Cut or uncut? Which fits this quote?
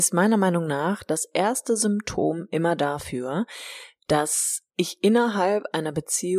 cut